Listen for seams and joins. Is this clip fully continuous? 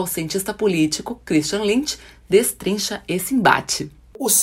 yes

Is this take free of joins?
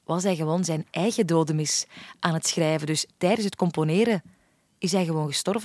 yes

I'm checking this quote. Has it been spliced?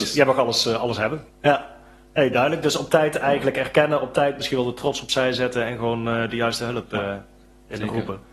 yes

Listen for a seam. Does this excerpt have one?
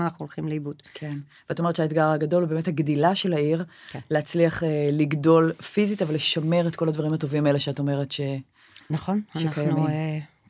no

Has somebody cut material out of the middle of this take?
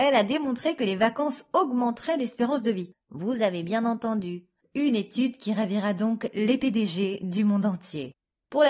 no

